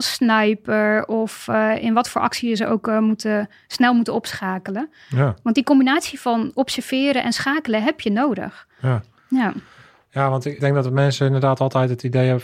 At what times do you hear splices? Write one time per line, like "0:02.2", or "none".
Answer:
0:10.6